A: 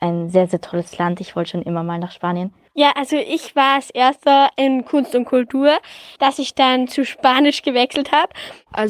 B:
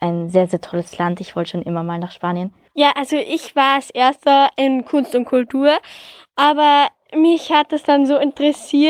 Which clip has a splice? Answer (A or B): A